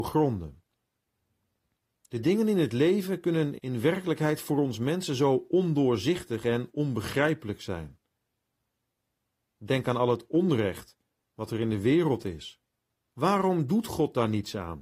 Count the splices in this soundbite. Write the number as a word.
two